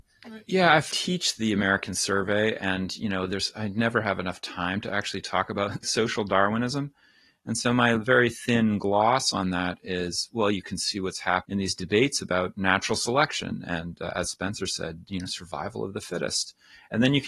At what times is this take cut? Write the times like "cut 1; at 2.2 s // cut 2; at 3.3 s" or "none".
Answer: none